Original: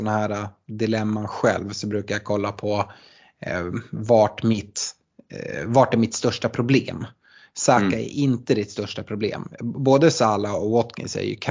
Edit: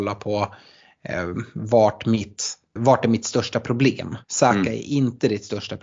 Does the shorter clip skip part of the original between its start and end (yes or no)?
yes